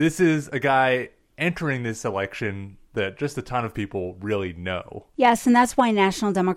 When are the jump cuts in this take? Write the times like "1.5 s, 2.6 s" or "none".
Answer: none